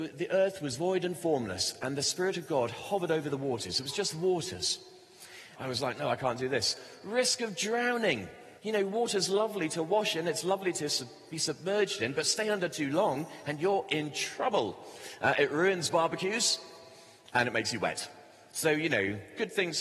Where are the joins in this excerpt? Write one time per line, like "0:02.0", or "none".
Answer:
0:05.5
0:08.6